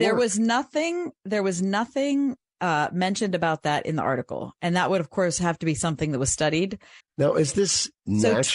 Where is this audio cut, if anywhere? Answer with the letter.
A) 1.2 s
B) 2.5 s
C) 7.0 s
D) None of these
C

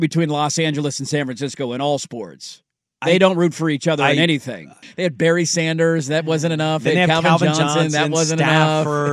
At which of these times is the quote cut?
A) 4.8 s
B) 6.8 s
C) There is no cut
A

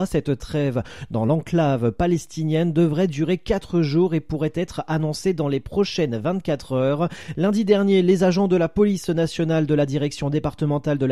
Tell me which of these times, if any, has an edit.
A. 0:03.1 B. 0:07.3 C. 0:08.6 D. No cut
B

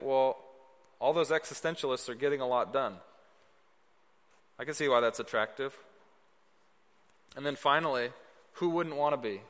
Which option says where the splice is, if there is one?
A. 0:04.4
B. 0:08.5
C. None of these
A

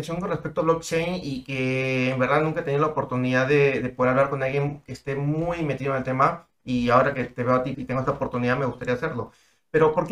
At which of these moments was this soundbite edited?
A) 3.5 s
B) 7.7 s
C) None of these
B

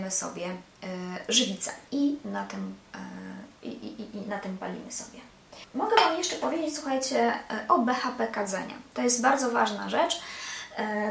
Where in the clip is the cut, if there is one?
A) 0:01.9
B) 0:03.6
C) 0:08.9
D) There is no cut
A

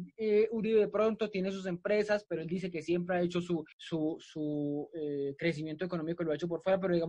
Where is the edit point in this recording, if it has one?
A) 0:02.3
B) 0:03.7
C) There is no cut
B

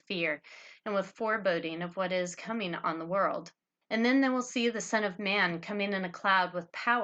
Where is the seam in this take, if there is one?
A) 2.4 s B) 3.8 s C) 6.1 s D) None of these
B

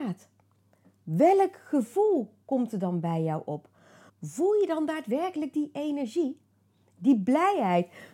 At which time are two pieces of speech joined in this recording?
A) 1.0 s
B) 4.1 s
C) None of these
B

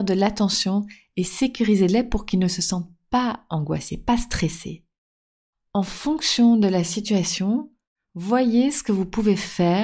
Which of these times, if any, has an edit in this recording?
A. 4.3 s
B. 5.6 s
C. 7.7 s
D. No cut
D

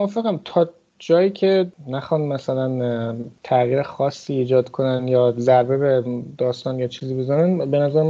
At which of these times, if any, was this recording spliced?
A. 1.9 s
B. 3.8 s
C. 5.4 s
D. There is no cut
D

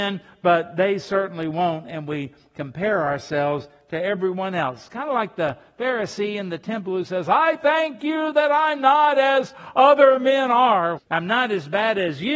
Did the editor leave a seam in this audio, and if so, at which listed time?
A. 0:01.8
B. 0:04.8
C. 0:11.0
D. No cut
C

